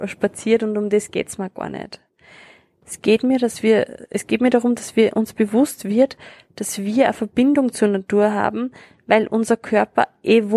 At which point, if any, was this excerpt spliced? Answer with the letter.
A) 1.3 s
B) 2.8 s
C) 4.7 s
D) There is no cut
B